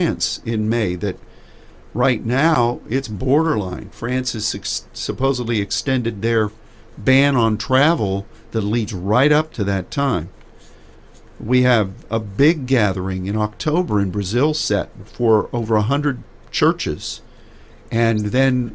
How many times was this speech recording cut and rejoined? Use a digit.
0